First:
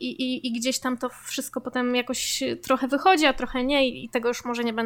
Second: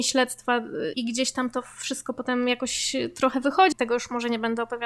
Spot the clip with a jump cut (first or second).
second